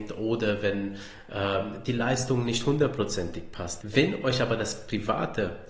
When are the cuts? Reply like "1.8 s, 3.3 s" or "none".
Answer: 3.8 s